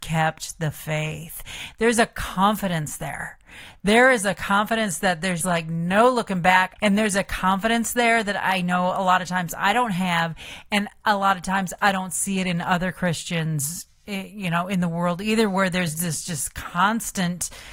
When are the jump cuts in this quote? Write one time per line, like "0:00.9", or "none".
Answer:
0:05.4
0:06.8